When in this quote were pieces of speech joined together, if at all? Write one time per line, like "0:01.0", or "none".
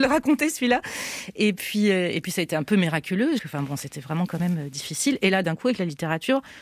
0:03.4